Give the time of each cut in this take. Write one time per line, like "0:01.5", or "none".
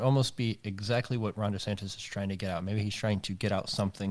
none

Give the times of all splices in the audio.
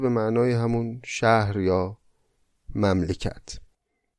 none

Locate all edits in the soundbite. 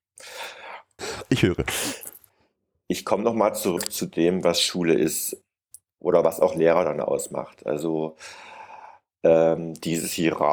0:01.0

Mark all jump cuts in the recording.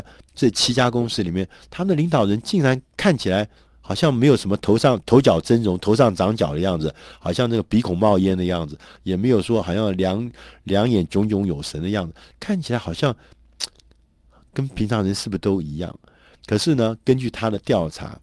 none

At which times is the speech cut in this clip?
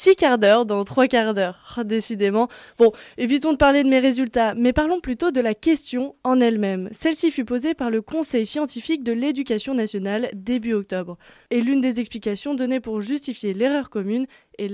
0:11.5

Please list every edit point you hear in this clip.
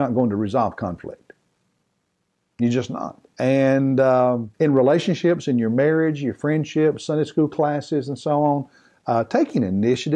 0:03.3
0:04.5

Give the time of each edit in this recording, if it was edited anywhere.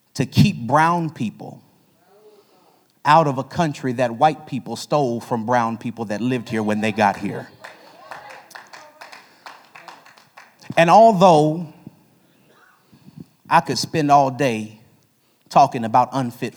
none

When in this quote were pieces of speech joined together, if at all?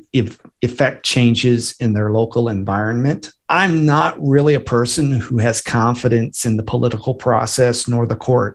0:03.4

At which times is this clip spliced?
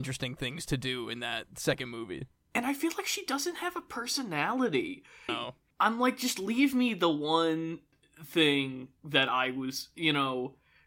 0:05.3

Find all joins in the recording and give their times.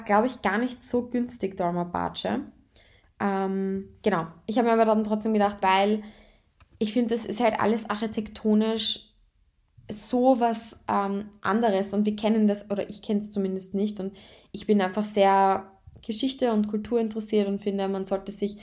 0:05.6

